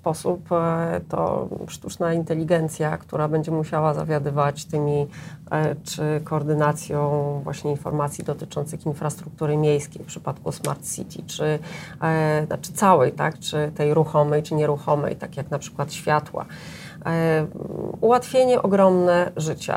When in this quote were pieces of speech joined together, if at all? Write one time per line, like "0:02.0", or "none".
none